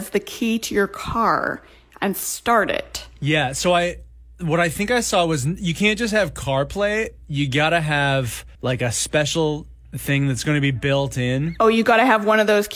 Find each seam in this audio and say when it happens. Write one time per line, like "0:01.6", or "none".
0:08.5